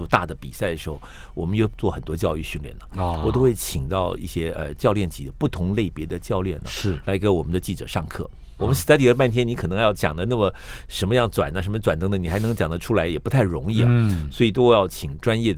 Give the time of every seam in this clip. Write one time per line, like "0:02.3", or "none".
0:08.6